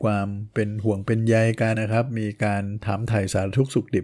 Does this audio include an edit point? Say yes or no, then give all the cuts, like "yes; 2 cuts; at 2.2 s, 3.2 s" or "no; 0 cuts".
yes; 1 cut; at 1.7 s